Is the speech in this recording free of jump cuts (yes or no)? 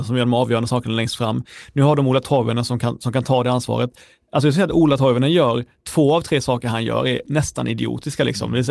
yes